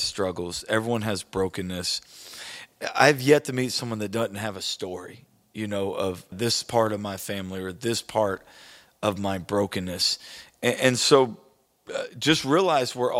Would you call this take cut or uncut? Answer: cut